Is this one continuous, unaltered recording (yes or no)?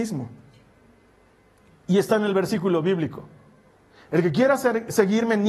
yes